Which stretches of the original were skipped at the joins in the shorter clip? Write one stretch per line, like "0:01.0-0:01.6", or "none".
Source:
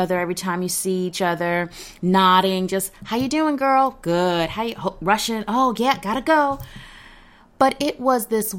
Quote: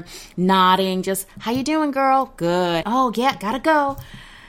0:04.5-0:05.4

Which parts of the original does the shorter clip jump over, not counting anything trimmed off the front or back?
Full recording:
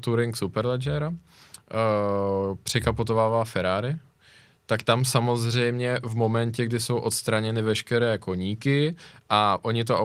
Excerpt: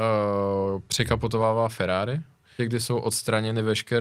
0:04.3-0:06.6

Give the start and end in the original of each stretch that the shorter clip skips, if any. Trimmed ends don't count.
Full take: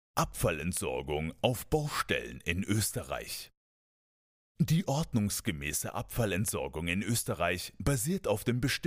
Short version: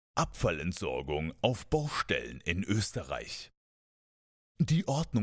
none

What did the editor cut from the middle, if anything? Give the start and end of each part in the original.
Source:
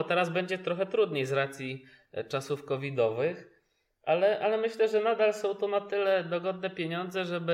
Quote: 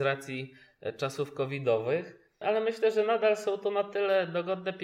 0:03.7-0:04.4

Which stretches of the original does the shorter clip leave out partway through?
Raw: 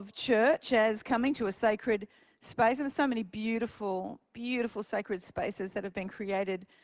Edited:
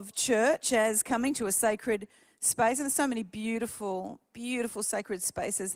none

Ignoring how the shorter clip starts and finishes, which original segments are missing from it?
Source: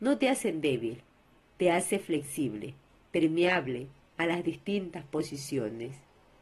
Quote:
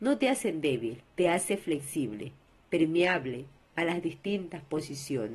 0:01.1-0:01.5

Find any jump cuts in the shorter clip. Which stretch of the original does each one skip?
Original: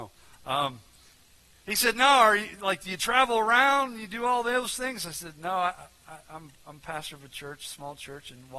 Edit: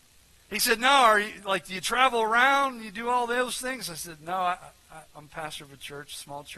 0:06.2-0:06.6

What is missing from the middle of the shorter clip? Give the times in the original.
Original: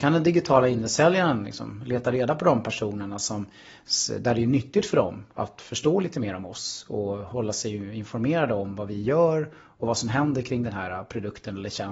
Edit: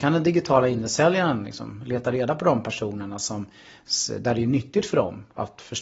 none

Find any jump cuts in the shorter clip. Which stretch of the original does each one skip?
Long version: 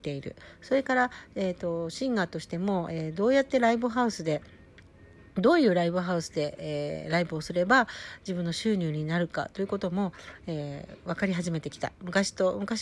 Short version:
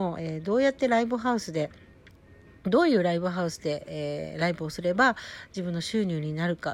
none

